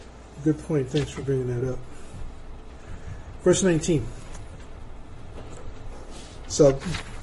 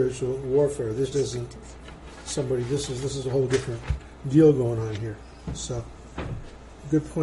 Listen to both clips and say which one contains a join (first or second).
second